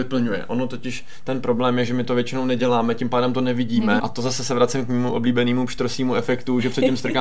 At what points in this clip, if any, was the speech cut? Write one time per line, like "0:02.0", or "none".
0:04.0

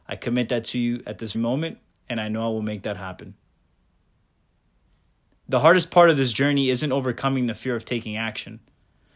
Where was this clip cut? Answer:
0:01.3

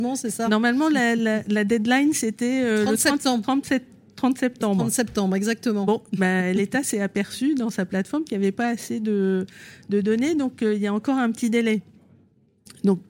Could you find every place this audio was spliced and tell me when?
none

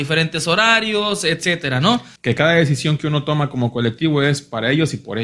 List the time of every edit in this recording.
0:02.2

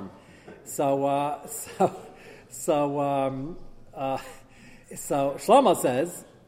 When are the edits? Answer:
0:04.8

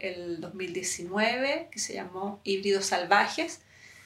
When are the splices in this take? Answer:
none

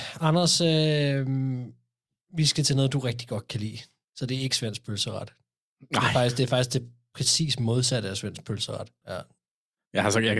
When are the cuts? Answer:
0:09.0

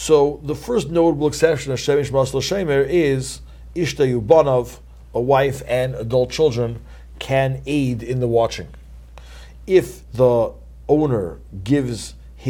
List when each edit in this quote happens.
0:10.0

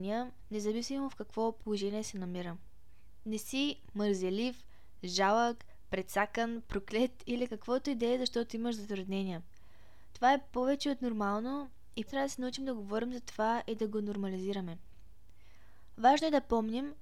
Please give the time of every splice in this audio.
0:12.1

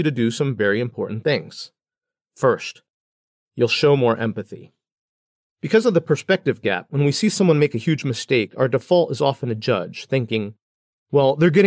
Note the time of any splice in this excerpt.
none

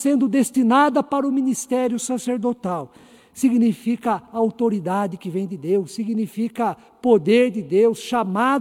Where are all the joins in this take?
none

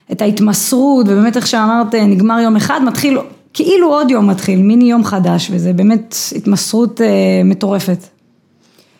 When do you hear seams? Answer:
none

